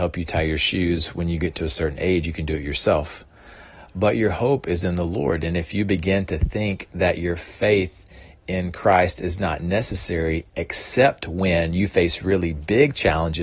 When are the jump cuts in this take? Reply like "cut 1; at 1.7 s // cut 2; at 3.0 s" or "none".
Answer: none

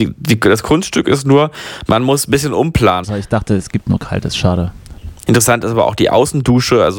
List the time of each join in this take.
cut 1; at 3.0 s // cut 2; at 5.2 s

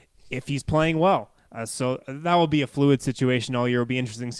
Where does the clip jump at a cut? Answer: none

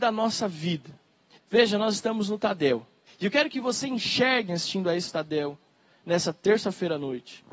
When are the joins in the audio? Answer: cut 1; at 1.3 s // cut 2; at 3.1 s // cut 3; at 4.5 s

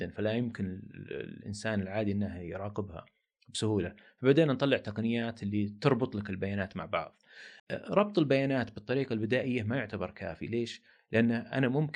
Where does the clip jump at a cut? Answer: cut 1; at 7.6 s

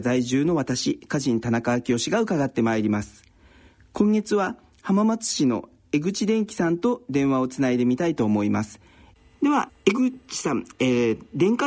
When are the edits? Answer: cut 1; at 9.7 s

